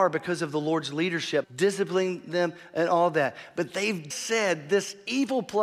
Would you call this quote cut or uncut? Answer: cut